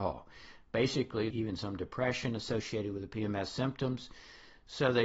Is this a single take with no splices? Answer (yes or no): no